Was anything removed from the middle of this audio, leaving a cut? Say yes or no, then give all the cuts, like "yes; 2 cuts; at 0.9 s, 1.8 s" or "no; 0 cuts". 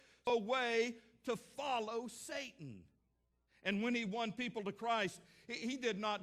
yes; 1 cut; at 3.5 s